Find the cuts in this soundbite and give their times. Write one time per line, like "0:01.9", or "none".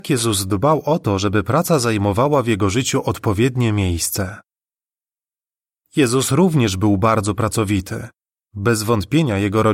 0:08.4